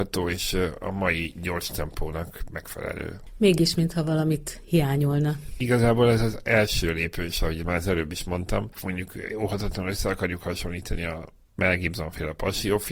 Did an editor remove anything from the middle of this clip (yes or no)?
no